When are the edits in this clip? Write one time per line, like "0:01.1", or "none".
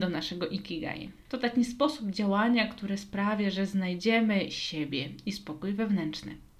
0:01.2